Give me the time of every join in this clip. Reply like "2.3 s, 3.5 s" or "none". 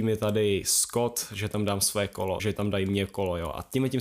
2.4 s